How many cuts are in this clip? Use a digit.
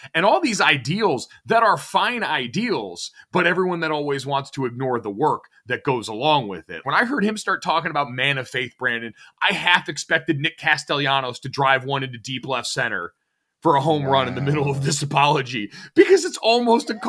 1